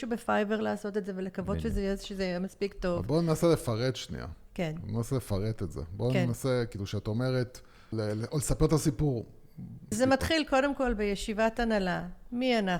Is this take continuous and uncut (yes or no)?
no